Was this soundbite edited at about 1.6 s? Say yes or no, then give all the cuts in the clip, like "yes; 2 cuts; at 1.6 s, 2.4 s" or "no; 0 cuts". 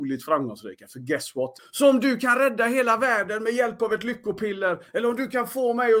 yes; 1 cut; at 1.6 s